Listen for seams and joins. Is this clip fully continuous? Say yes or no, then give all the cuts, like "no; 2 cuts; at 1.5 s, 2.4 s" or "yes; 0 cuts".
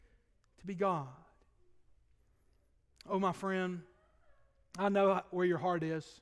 yes; 0 cuts